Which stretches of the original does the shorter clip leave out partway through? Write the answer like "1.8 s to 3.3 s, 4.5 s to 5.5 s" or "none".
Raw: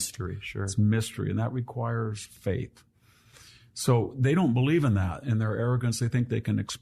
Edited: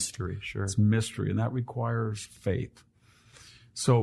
none